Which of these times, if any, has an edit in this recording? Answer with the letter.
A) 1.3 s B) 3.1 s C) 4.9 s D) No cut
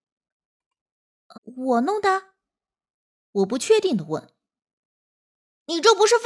A